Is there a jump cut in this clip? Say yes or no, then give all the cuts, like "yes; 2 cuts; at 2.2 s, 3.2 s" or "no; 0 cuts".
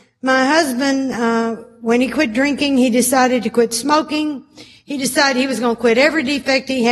no; 0 cuts